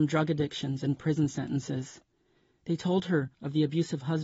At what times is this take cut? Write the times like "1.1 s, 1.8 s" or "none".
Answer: none